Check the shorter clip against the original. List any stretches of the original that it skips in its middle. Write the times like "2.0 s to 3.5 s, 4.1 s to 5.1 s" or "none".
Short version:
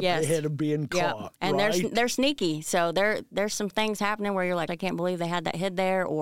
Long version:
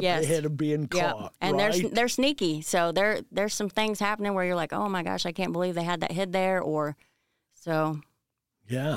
4.7 s to 5.2 s